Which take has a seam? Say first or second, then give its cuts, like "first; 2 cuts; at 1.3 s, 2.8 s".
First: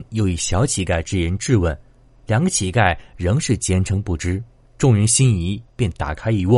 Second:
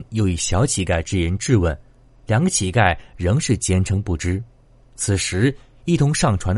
first; 1 cut; at 4.6 s